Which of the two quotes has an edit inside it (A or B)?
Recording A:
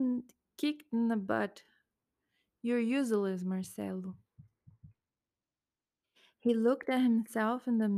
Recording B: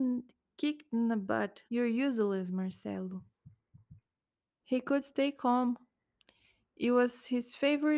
B